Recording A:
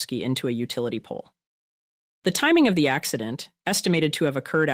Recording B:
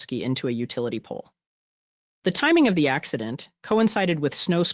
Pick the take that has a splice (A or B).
B